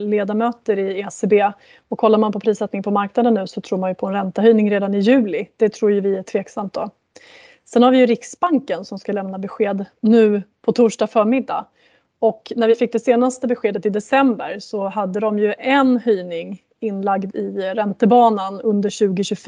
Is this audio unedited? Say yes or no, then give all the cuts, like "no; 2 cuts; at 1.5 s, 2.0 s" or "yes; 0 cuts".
yes; 0 cuts